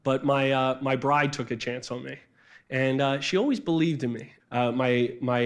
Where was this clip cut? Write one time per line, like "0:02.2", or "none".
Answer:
0:04.4